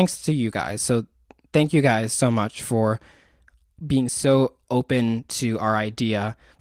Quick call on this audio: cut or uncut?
uncut